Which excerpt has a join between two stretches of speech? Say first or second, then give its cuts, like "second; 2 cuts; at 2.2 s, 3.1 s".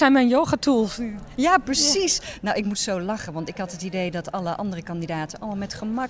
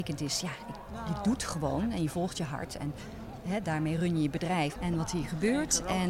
second; 1 cut; at 4.8 s